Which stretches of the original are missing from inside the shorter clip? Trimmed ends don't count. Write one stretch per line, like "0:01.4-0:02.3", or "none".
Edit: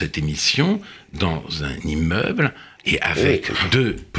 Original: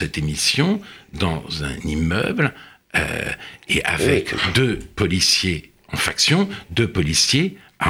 0:02.8-0:03.6